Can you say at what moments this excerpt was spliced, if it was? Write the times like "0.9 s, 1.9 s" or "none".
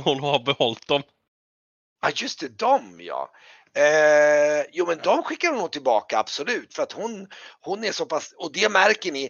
none